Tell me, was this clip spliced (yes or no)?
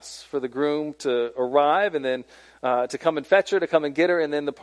no